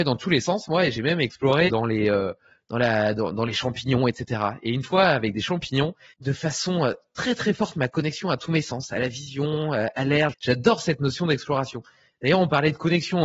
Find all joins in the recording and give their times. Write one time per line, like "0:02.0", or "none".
0:01.7
0:06.1
0:10.3

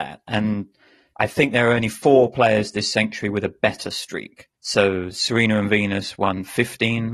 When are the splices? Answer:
none

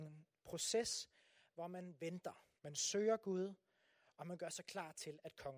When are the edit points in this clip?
0:02.6

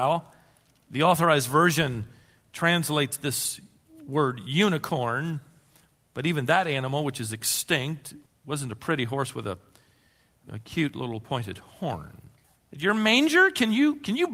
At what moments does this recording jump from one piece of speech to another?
0:12.5

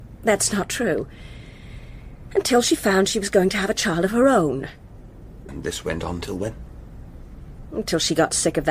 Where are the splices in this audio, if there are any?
0:05.5

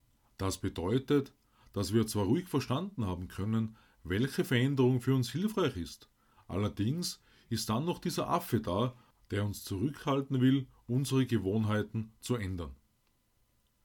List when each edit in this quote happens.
none

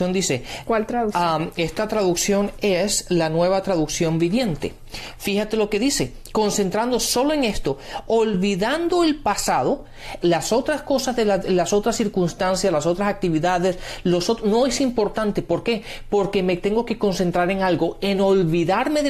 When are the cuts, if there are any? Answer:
0:05.2
0:10.2

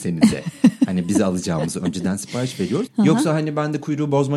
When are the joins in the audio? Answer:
0:02.9

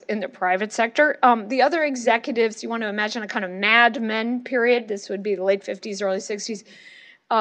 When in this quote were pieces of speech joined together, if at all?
none

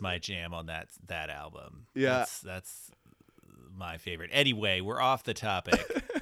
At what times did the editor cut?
none

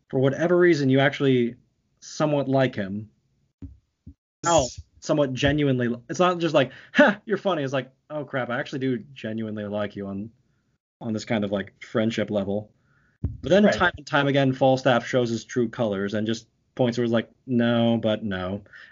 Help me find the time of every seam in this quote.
0:04.4

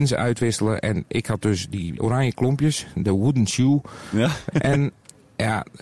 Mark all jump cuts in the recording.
0:02.0
0:04.5

